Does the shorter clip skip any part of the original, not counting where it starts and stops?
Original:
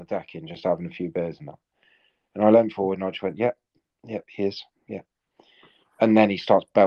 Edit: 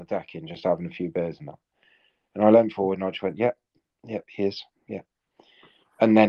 no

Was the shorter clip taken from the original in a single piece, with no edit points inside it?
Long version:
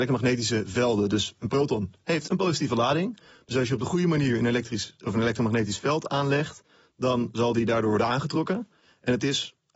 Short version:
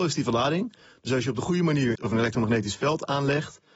no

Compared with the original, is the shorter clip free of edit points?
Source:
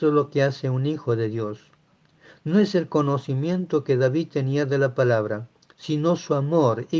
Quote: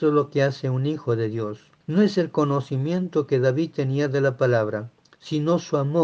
no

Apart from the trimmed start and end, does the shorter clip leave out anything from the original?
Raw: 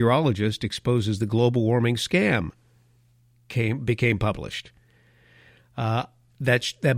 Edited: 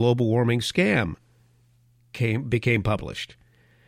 no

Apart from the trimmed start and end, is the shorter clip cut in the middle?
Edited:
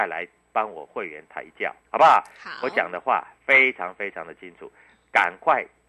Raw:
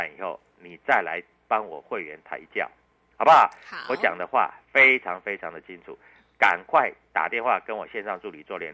yes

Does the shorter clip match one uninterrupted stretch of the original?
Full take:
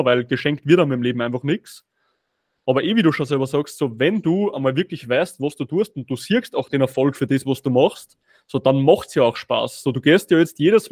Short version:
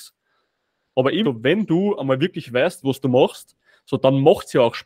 no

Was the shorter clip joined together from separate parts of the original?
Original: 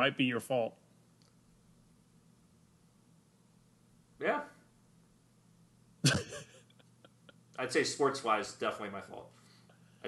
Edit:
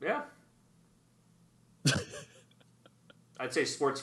no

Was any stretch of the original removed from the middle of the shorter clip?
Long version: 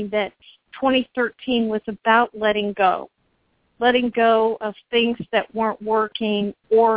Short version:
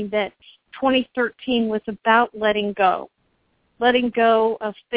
no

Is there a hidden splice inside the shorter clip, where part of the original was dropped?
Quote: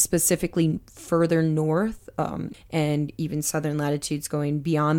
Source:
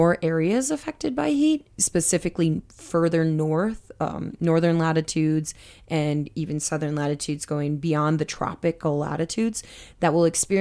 yes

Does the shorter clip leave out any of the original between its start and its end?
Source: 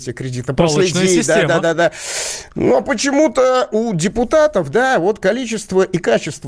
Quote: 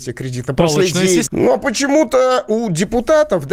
yes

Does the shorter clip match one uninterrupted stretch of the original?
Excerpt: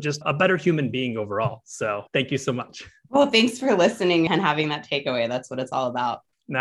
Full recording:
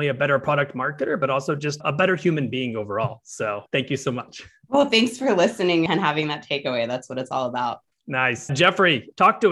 yes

